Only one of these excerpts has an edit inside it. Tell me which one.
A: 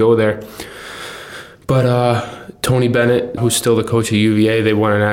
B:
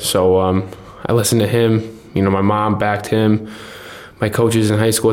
A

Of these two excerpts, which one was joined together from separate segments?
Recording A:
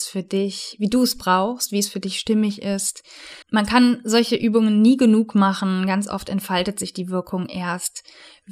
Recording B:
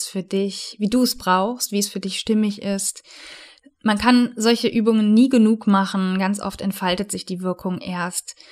A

